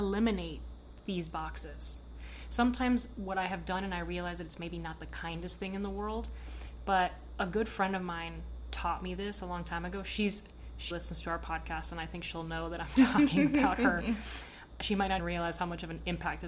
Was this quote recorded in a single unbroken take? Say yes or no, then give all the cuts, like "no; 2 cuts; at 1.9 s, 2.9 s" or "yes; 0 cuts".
no; 2 cuts; at 10.9 s, 15.2 s